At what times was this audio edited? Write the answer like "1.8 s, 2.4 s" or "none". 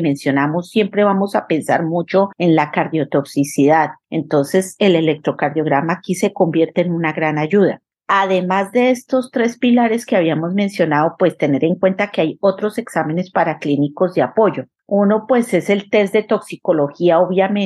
none